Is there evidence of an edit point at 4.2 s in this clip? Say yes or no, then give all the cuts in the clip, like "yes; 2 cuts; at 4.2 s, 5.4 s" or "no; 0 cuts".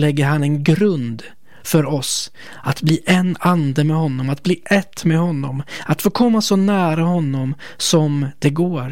no; 0 cuts